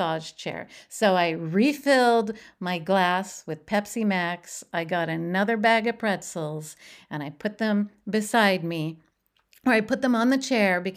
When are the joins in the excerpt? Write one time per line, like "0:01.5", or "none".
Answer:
none